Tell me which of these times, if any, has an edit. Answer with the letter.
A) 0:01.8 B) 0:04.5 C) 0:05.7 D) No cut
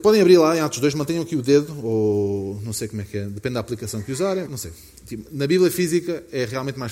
B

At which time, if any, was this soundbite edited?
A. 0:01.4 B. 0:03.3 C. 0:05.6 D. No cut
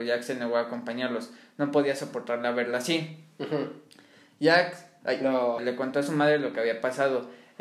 C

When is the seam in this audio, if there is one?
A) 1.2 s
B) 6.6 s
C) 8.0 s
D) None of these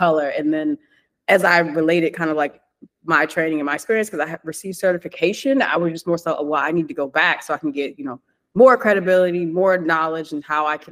D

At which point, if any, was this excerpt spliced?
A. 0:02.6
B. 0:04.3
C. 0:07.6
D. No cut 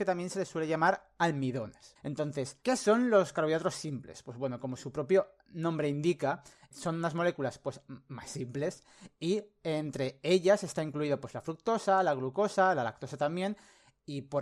A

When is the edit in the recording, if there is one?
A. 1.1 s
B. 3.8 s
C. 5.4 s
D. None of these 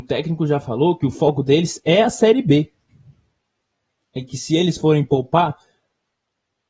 D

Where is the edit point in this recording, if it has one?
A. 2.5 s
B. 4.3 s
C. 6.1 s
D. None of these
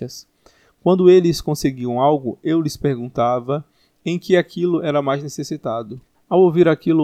C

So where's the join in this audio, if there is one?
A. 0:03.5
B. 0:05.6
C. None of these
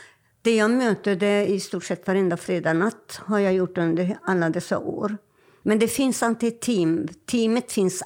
B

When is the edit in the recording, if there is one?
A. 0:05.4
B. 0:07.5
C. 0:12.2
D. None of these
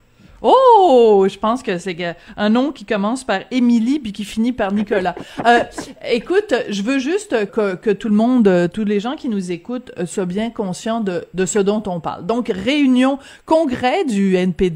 B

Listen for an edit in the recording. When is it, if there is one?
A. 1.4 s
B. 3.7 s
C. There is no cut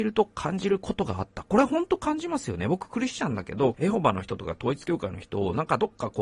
B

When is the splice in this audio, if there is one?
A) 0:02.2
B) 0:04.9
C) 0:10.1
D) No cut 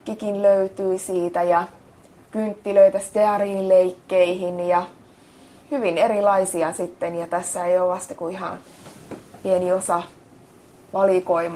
D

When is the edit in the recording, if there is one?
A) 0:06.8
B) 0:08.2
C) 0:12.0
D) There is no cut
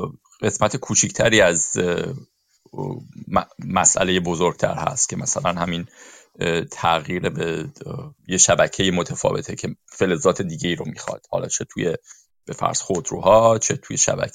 B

